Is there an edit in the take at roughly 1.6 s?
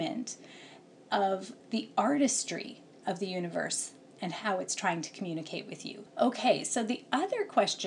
yes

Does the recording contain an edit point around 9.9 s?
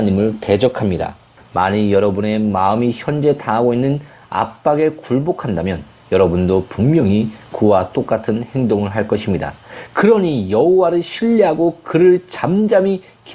no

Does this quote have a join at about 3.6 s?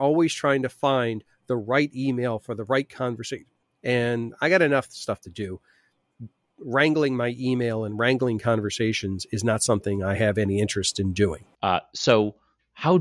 yes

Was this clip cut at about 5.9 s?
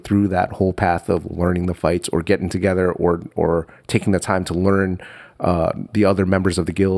yes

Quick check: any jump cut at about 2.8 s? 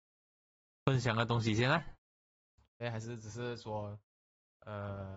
yes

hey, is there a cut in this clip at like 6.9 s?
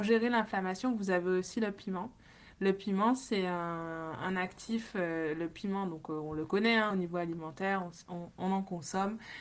no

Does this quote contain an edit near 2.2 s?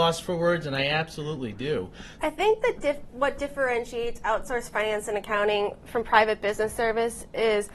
yes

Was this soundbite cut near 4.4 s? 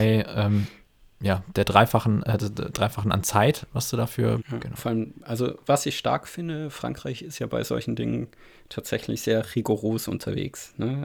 yes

